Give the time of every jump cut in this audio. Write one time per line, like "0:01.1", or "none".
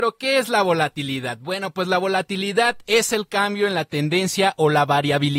none